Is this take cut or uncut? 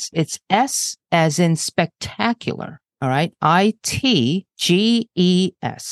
uncut